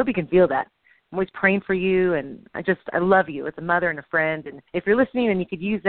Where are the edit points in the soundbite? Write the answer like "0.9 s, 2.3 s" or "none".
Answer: 4.7 s